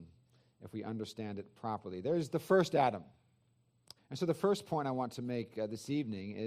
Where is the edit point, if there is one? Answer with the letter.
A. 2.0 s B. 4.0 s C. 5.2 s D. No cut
B